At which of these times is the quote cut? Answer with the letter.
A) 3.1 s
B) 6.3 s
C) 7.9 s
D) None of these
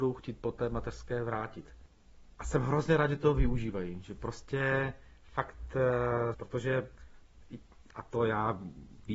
B